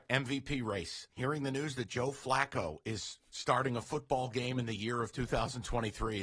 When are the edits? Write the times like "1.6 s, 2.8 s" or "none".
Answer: 1.1 s